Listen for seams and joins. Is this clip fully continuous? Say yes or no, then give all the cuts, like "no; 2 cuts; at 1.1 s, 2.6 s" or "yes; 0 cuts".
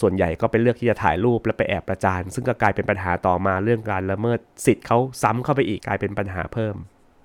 no; 1 cut; at 5.8 s